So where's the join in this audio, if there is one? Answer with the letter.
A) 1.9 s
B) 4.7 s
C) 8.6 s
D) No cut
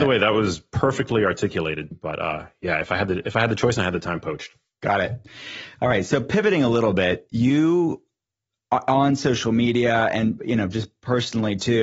A